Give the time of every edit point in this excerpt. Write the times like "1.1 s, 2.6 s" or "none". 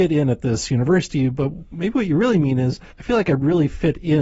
2.9 s

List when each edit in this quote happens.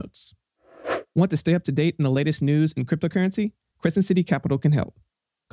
3.7 s

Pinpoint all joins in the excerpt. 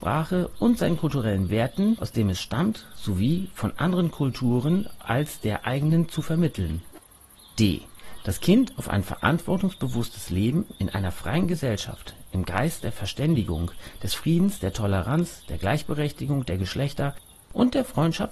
2.0 s

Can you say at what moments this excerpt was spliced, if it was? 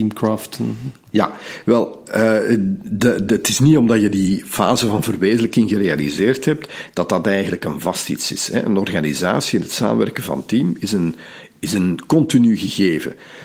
3.3 s

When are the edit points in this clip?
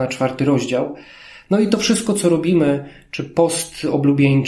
none

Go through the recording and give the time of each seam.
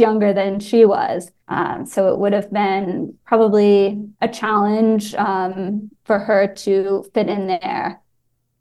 1.4 s, 4.1 s

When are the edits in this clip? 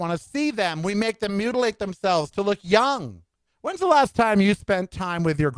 3.5 s

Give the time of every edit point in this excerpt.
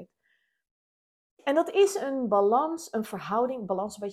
none

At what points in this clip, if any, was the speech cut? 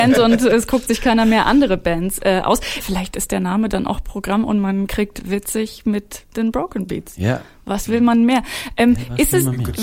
2.8 s

